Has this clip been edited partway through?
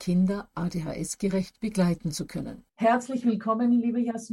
yes; 1 cut; at 2.7 s

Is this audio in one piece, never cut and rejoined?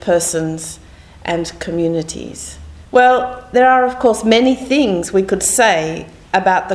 no; 1 cut; at 2.9 s

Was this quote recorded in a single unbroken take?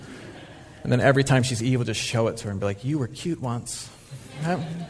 yes; 0 cuts

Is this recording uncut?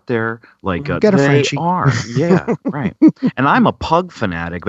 no; 1 cut; at 1.0 s

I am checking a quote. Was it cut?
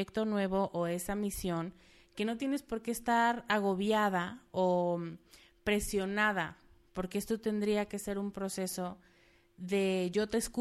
no; 0 cuts

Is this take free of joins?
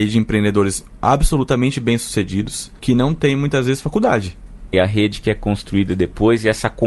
no; 2 cuts; at 2.8 s, 4.7 s

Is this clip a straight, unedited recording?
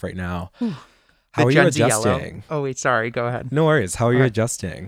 yes; 0 cuts

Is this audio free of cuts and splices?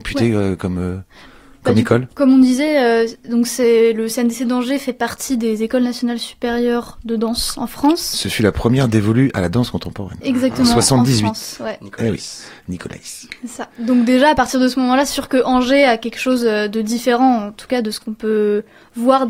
no; 1 cut; at 2.1 s

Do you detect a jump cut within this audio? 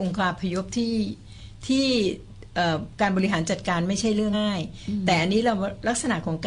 yes; 1 cut; at 4.3 s

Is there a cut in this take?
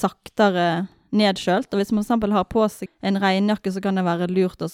yes; 1 cut; at 2.9 s

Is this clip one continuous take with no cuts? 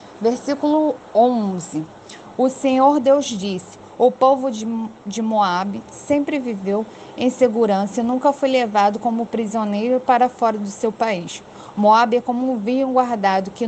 yes; 0 cuts

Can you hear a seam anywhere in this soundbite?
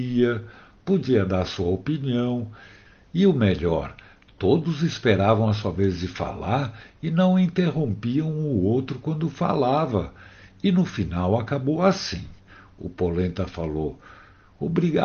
no; 0 cuts

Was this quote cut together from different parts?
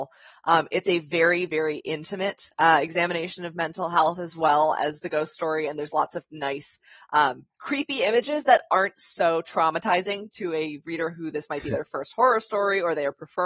no; 0 cuts

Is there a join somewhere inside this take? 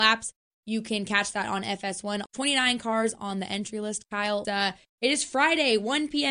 yes; 2 cuts; at 2.3 s, 4.4 s

